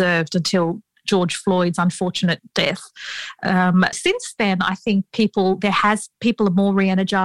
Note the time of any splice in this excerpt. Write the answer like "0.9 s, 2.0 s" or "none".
3.9 s